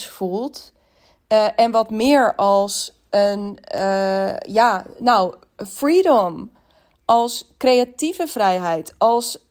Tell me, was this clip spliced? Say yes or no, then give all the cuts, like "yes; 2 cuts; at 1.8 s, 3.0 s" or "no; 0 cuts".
no; 0 cuts